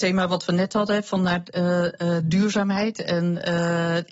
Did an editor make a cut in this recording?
no; 0 cuts

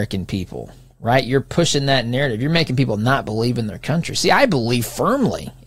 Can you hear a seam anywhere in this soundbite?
no; 0 cuts

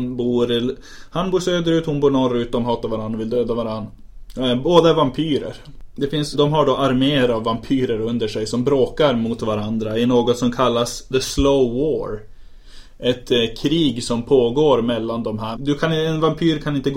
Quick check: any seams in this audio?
yes; 3 cuts; at 6.3 s, 11.1 s, 15.5 s

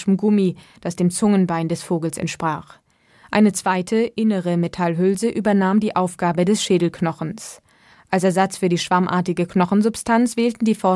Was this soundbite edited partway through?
no; 0 cuts

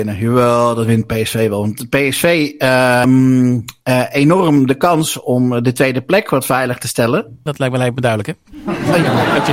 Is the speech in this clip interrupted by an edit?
yes; 2 cuts; at 3.0 s, 7.5 s

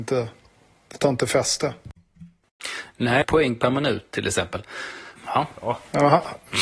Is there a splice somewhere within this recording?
yes; 2 cuts; at 3.2 s, 5.2 s

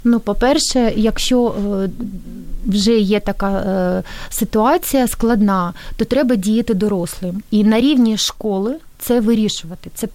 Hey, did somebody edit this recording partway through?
no; 0 cuts

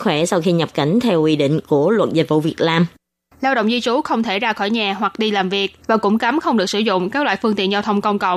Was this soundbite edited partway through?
yes; 2 cuts; at 3.3 s, 5.8 s

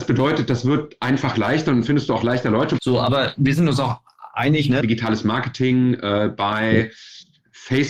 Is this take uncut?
no; 2 cuts; at 2.8 s, 4.8 s

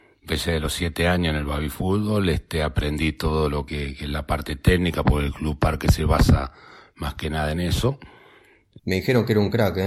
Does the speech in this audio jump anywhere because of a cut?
yes; 2 cuts; at 3.7 s, 8.8 s

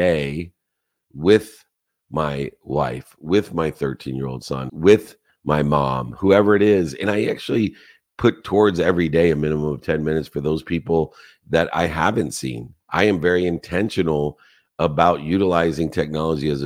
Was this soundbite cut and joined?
yes; 1 cut; at 4.7 s

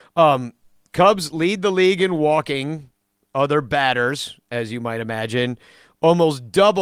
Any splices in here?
no; 0 cuts

